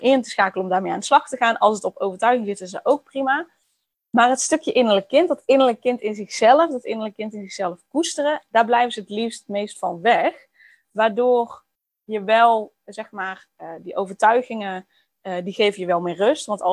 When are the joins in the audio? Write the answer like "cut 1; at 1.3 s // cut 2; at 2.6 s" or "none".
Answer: none